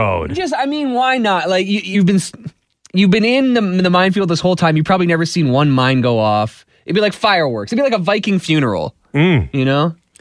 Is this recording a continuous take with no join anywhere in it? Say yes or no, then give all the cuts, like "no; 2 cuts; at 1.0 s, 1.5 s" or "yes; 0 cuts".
yes; 0 cuts